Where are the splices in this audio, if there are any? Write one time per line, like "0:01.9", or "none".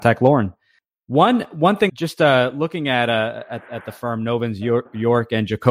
0:01.9